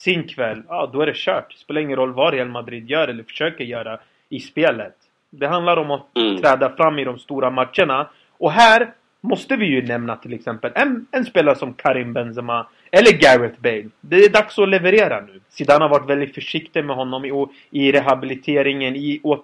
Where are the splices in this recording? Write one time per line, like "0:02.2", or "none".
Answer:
0:15.4